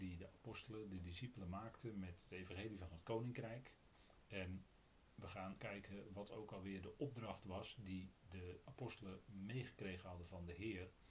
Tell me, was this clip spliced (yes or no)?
yes